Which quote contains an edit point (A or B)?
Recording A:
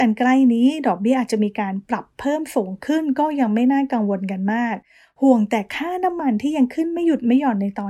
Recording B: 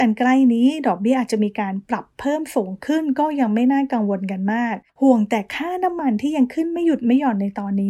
B